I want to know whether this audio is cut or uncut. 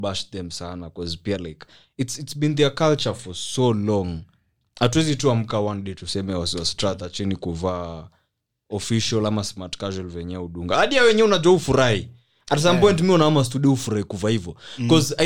uncut